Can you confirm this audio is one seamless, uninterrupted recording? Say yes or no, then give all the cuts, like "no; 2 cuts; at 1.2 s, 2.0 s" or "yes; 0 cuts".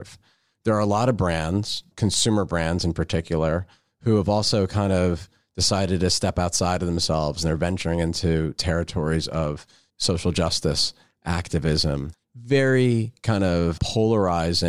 yes; 0 cuts